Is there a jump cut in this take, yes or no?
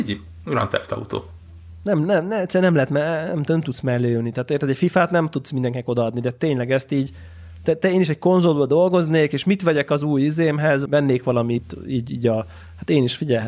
yes